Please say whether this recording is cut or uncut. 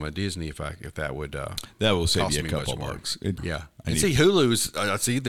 cut